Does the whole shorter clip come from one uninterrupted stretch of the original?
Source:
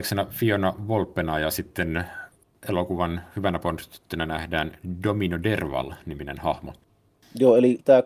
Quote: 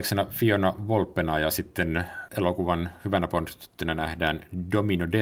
no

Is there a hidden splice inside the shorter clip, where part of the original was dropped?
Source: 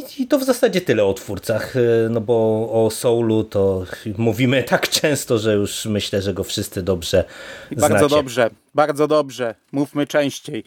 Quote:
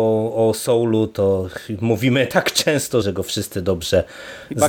yes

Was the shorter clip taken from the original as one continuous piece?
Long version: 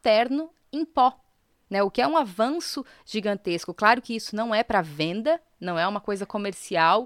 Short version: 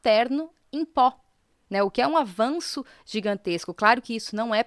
yes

